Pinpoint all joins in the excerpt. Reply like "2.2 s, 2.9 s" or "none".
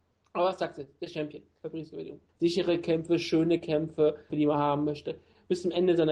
2.3 s, 4.3 s